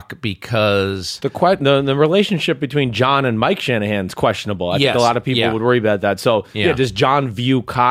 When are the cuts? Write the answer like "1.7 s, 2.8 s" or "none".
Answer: none